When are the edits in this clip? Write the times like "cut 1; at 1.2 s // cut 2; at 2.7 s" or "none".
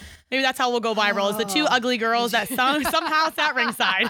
none